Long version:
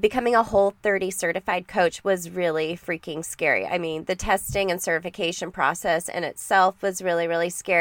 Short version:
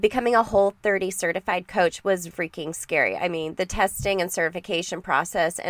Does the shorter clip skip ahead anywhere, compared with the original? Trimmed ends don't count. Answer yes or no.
yes